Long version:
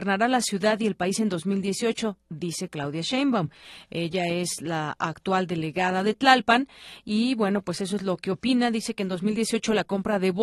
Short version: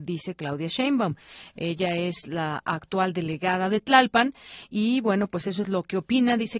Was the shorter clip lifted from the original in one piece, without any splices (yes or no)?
yes